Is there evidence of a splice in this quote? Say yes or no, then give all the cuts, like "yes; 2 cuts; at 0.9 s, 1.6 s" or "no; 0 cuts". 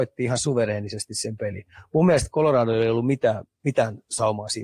no; 0 cuts